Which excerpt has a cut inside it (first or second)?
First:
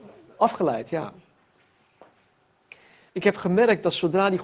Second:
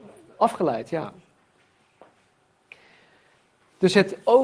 first